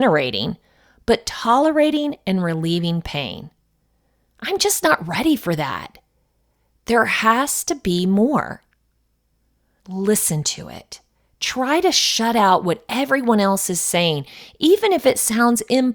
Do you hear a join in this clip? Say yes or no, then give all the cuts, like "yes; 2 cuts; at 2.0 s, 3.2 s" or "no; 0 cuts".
yes; 1 cut; at 9.8 s